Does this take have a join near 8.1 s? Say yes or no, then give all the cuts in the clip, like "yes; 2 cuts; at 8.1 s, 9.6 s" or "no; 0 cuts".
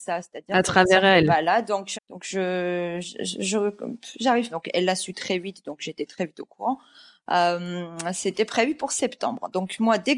no; 2 cuts; at 1.9 s, 4.5 s